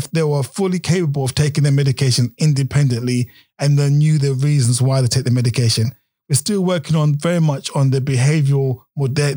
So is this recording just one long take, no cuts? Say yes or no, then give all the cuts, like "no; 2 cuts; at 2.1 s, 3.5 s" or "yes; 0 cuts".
yes; 0 cuts